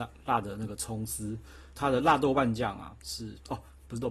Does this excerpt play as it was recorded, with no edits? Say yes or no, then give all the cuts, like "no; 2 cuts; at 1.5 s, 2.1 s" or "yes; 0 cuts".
no; 1 cut; at 1.7 s